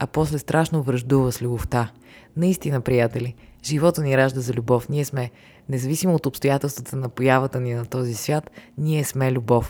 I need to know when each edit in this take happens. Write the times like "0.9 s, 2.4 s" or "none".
none